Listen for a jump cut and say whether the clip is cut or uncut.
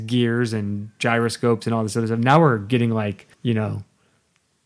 cut